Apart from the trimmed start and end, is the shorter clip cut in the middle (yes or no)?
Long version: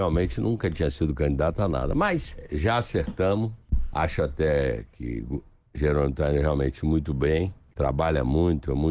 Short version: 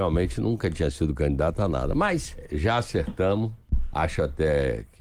no